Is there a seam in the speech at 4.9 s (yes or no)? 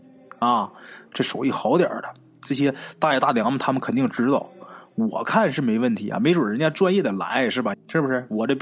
no